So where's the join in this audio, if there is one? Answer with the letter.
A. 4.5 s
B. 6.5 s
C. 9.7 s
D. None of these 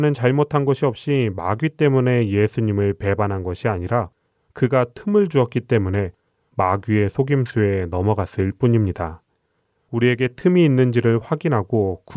C